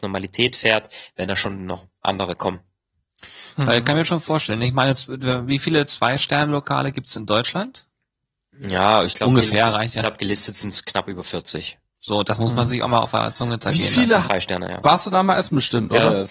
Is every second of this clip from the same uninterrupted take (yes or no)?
no